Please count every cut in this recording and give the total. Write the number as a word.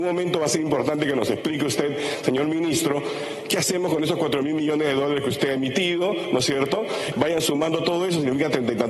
one